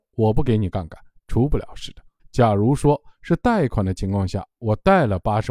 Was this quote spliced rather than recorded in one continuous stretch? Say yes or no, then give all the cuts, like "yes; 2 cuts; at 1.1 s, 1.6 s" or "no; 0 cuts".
yes; 1 cut; at 2.2 s